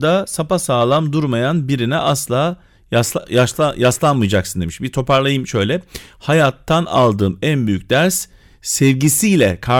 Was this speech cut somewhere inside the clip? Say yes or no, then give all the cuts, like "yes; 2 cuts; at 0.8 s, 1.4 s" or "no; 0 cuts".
no; 0 cuts